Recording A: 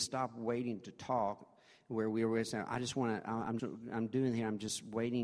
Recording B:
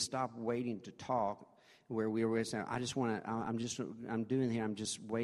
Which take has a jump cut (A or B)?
A